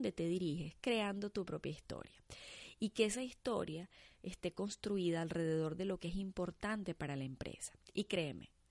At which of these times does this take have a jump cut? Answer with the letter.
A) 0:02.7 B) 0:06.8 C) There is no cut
C